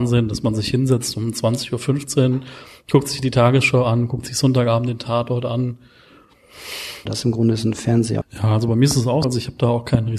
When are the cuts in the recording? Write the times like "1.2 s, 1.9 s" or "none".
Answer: 7.1 s, 8.2 s, 9.2 s